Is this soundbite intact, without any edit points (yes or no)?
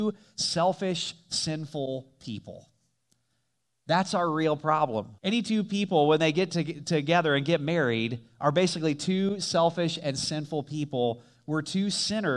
no